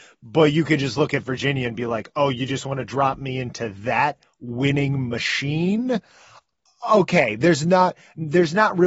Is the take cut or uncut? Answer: uncut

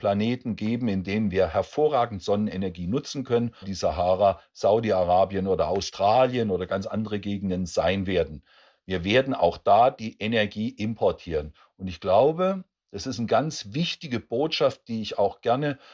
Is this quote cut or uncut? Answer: cut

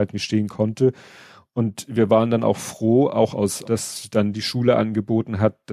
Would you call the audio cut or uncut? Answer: cut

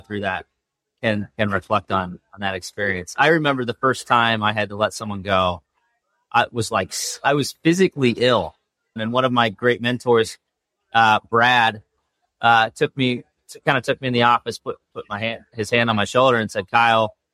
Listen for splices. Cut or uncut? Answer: cut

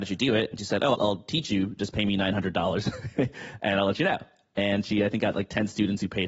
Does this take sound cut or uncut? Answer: cut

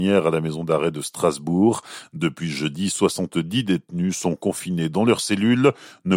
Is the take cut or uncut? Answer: uncut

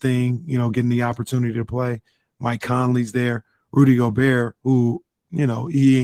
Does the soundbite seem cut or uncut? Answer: uncut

